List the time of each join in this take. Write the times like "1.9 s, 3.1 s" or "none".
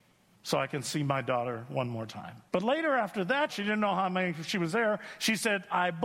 2.5 s, 3.5 s